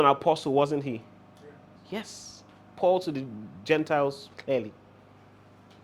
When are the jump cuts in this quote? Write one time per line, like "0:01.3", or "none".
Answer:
0:01.8
0:04.3